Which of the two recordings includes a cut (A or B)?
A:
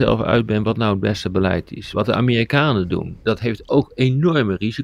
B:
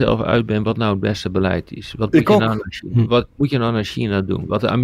A